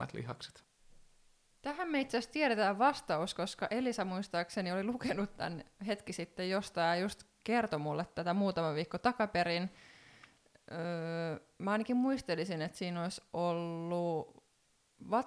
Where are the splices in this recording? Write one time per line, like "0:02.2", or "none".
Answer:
none